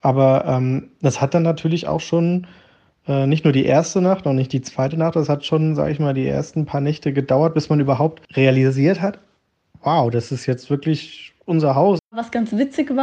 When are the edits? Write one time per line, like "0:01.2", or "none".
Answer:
0:08.3
0:12.0